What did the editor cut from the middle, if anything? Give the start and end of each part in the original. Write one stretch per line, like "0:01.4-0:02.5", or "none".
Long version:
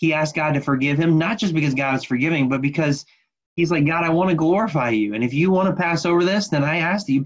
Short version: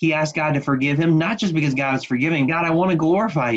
0:02.5-0:03.9

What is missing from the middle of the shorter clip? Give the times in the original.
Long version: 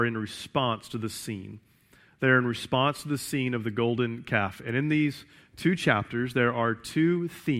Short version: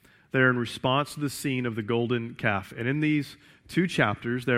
none

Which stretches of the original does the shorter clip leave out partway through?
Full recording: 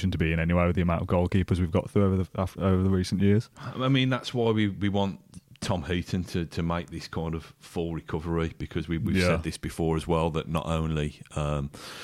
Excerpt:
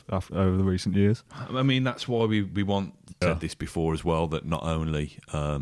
0:05.5-0:09.2

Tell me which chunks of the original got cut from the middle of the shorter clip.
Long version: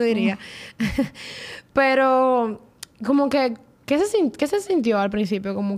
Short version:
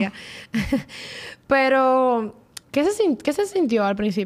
0:02.9-0:03.8

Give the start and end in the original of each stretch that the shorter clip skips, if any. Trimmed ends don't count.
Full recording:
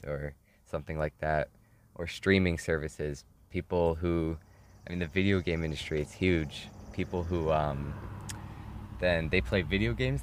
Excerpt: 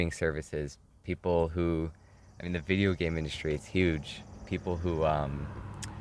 none

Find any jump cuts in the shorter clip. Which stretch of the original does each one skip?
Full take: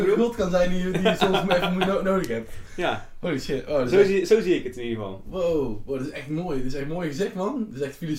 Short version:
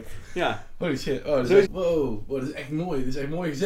0:04.1-0:05.2

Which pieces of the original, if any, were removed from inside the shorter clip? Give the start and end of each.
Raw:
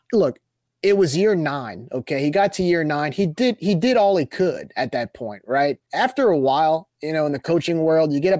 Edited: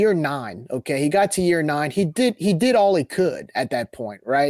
none

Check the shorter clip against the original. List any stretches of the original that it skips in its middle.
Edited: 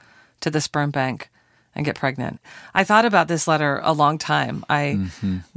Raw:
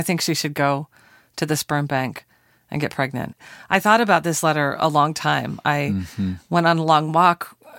none

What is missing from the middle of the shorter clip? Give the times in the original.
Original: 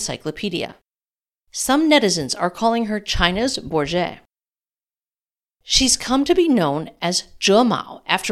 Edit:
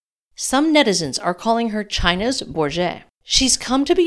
0:04.3-0:05.5

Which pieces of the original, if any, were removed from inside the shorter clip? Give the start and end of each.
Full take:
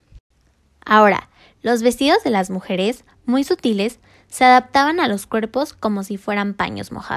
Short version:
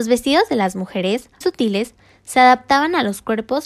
0:03.1-0:03.5

